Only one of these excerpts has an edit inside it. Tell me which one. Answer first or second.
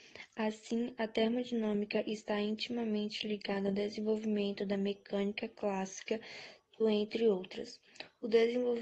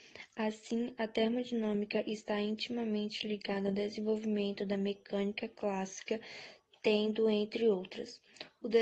first